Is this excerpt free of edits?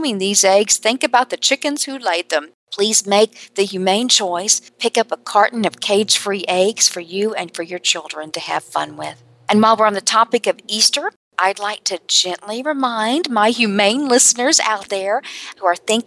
yes; 0 cuts

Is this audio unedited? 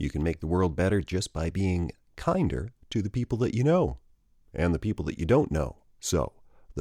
no; 1 cut; at 5.9 s

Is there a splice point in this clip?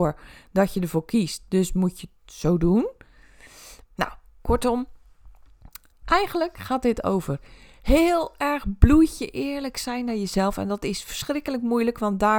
yes; 1 cut; at 3.8 s

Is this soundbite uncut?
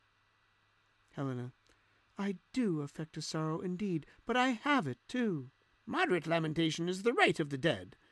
no; 1 cut; at 5.7 s

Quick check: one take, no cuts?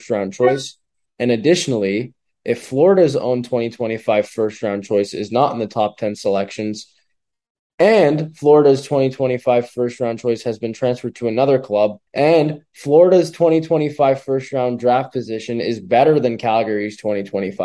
no; 1 cut; at 12.1 s

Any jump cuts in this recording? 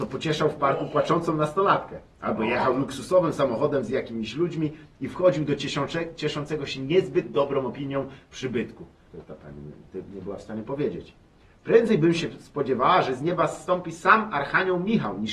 yes; 1 cut; at 9.1 s

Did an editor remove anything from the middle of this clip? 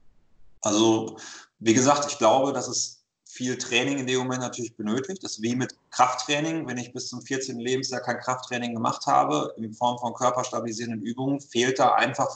no; 0 cuts

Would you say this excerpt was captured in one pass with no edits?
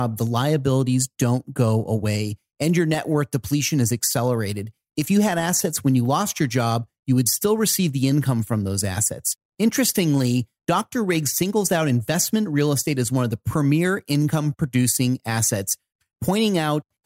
yes; 0 cuts

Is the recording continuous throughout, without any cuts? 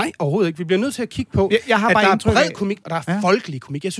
no; 1 cut; at 2.8 s

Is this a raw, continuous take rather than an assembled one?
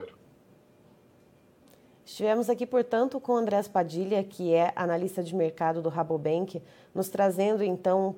yes; 0 cuts

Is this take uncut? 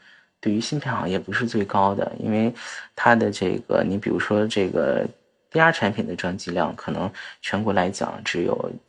yes; 0 cuts

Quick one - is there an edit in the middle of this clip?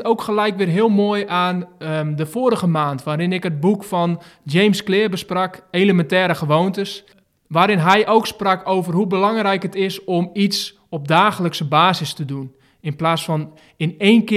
no; 0 cuts

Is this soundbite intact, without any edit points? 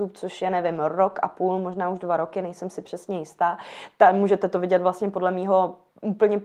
yes; 0 cuts

